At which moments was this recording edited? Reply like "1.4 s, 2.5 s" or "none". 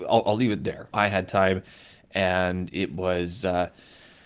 0.9 s